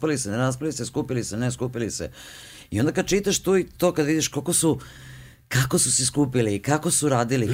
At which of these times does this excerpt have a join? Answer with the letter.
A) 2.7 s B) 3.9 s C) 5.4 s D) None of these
D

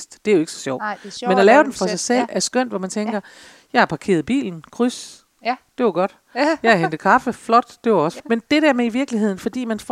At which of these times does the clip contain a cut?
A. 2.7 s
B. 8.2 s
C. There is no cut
B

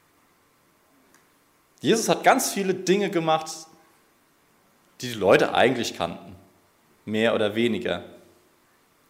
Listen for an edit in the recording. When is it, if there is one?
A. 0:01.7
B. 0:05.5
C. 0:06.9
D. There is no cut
A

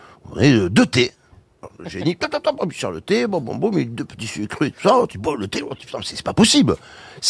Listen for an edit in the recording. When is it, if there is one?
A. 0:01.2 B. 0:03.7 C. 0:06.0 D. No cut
D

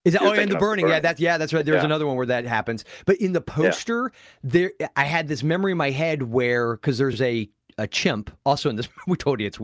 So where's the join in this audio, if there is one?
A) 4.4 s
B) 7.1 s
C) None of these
C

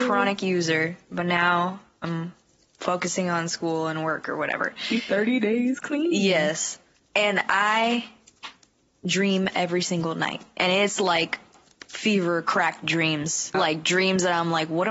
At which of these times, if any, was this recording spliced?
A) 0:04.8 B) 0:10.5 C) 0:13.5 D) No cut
C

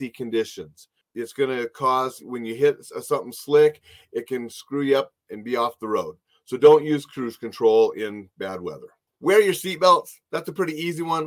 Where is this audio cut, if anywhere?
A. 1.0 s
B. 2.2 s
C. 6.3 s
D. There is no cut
B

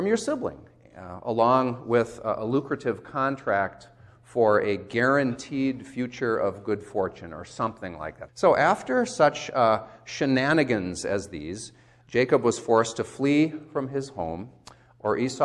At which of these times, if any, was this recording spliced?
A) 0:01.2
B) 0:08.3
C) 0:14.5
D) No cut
B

